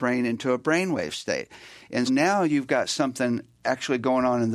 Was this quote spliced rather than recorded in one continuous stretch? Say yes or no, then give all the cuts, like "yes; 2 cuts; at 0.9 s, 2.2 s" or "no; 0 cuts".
yes; 1 cut; at 2.1 s